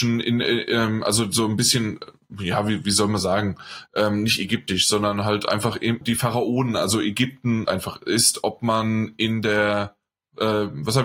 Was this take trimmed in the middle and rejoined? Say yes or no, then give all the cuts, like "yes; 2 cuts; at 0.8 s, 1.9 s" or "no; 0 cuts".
yes; 2 cuts; at 6.0 s, 7.7 s